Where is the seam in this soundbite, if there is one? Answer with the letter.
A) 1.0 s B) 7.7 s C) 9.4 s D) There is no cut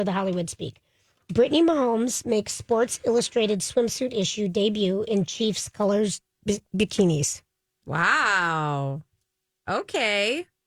D